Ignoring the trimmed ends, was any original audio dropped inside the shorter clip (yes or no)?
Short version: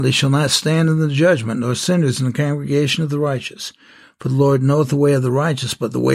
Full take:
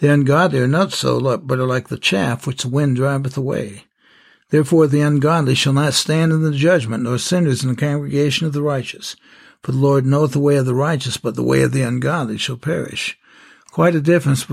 no